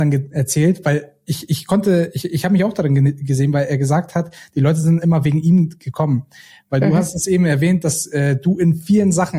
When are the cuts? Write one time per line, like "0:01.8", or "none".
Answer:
none